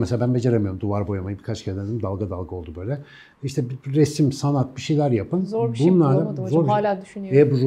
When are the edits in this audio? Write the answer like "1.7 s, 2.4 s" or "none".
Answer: none